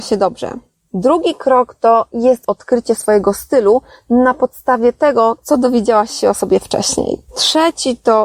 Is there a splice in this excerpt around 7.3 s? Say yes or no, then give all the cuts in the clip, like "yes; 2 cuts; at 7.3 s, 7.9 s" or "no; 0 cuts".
yes; 1 cut; at 7.3 s